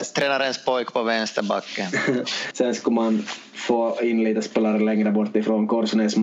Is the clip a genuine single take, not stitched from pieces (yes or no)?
no